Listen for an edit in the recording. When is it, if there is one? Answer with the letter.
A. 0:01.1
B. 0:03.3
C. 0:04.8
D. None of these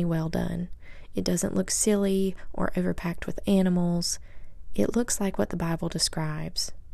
D